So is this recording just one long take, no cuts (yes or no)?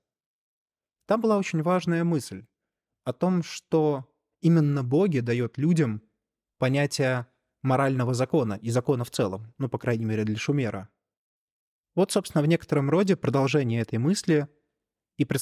yes